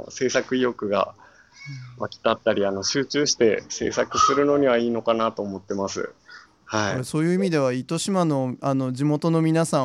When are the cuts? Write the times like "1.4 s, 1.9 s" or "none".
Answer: 6.4 s